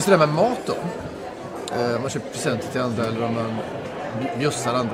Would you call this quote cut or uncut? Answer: cut